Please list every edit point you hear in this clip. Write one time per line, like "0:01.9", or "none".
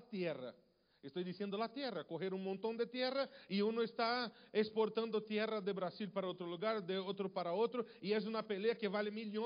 none